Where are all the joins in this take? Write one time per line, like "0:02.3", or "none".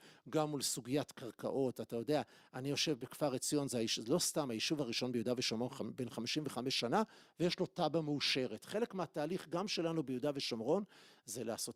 none